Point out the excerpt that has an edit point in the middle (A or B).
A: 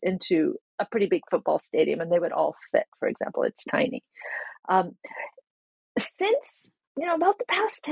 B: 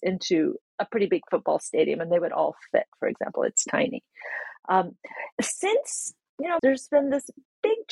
B